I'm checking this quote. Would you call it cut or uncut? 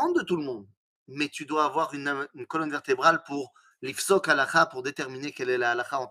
uncut